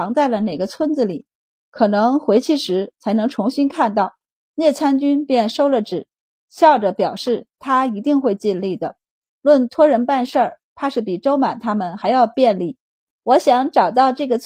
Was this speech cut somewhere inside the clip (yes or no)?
yes